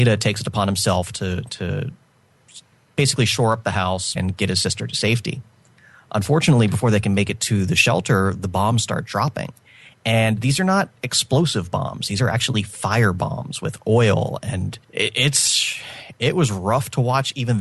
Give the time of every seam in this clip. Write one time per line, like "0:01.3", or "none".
0:04.2
0:14.8